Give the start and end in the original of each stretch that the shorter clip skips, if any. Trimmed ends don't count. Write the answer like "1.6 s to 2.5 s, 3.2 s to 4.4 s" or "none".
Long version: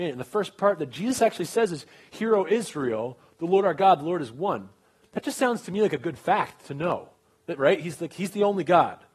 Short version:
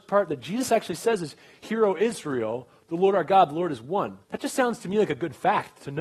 4.7 s to 5.1 s

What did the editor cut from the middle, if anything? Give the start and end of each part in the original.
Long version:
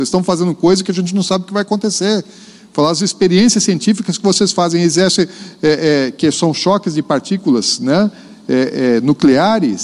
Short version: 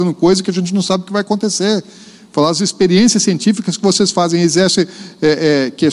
none

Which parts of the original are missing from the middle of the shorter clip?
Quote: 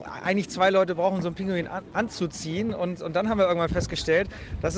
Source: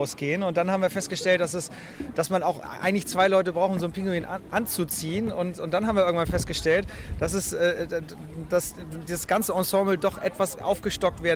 none

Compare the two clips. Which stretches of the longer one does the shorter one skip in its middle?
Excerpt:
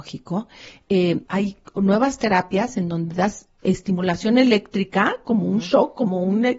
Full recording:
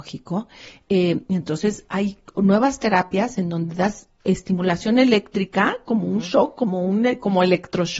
1.2 s to 1.9 s

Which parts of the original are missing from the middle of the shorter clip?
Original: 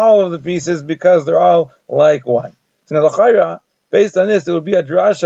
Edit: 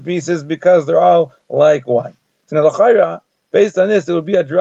none

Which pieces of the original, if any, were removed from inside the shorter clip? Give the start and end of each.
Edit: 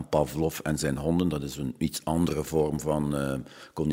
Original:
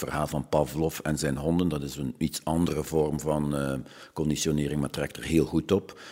none

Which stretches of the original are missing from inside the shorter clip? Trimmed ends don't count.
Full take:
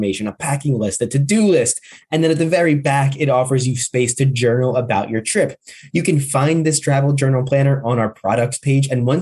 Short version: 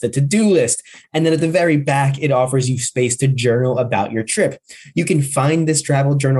none

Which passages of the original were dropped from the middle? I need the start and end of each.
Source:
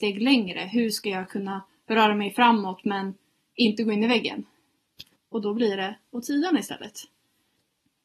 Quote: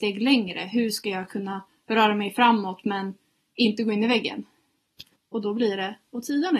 none

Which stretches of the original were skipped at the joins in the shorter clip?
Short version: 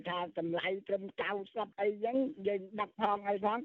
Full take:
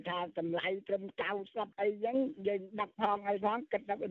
none

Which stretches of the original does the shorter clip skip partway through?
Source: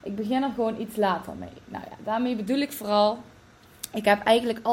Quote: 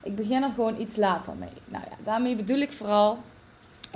none

